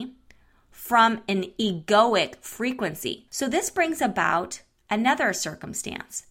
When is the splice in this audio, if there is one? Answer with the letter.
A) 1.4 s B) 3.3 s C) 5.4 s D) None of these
B